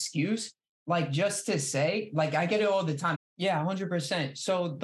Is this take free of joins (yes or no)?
no